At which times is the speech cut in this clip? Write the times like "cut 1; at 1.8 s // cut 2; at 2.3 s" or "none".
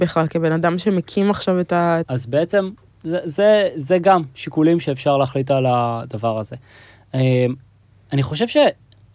cut 1; at 2.0 s